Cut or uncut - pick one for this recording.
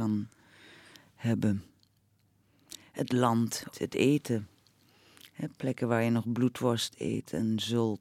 cut